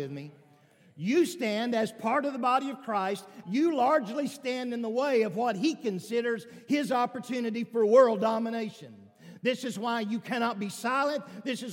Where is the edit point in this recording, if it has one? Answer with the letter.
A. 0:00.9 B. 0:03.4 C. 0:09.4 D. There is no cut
B